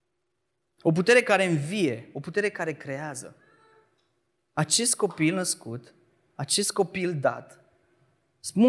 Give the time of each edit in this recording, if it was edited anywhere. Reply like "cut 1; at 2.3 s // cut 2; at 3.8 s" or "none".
none